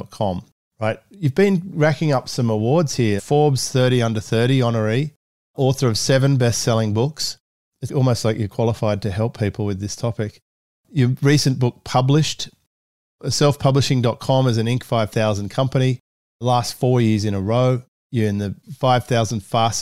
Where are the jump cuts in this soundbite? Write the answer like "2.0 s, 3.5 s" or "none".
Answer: 3.2 s, 7.9 s